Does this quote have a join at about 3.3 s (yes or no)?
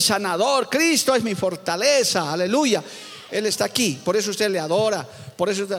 yes